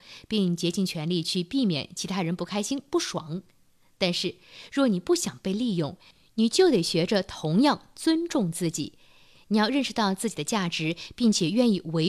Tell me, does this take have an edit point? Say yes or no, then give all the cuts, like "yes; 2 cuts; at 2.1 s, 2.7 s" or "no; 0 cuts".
no; 0 cuts